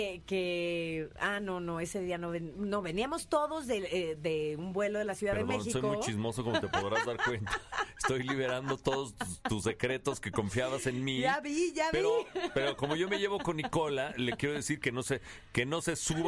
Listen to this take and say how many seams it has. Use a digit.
0